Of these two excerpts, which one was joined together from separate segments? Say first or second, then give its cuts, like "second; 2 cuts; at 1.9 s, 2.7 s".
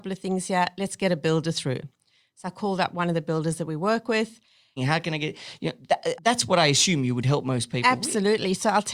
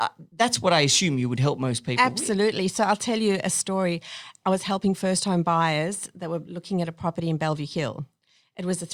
first; 2 cuts; at 4.8 s, 6.2 s